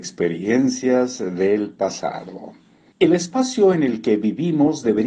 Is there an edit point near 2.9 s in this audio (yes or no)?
yes